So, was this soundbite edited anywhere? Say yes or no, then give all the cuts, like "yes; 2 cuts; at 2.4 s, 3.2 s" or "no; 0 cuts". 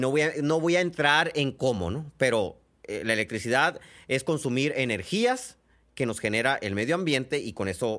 no; 0 cuts